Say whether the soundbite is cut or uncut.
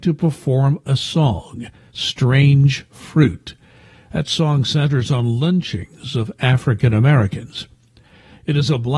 uncut